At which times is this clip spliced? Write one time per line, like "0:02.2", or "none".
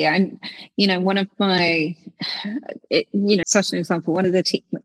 0:03.4